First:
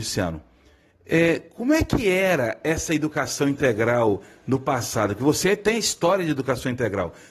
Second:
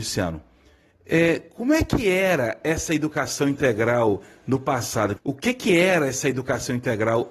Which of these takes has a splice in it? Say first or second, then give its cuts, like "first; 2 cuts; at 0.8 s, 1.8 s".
second; 1 cut; at 5.2 s